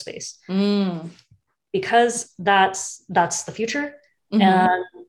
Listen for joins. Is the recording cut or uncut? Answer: uncut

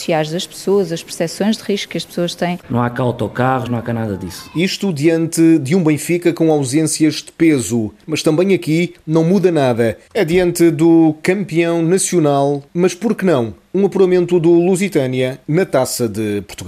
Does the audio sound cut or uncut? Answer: cut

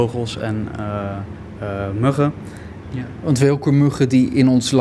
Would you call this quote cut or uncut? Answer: cut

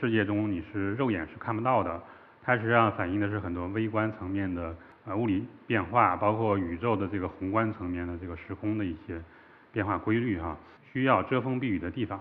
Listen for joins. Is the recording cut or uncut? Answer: cut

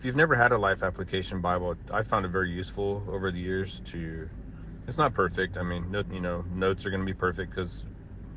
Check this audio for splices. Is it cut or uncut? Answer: cut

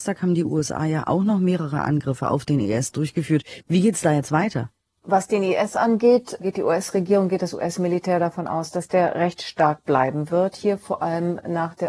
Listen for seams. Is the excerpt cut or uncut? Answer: uncut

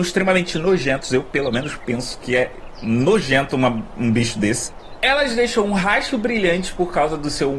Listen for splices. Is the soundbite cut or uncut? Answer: uncut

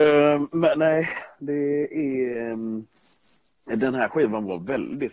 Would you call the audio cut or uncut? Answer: uncut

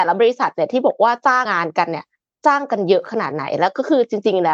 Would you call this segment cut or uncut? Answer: cut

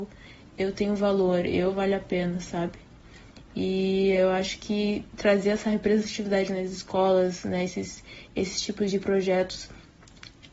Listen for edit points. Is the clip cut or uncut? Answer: uncut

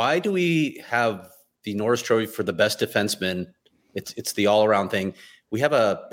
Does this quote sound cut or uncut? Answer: uncut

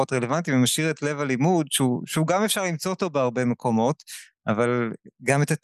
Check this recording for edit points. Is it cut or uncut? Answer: uncut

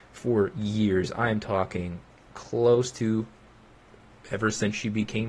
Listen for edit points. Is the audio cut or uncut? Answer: uncut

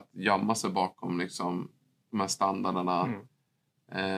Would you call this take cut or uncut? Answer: uncut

